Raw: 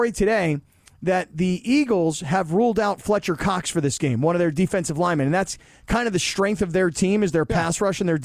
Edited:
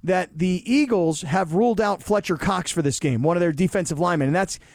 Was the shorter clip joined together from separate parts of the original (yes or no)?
no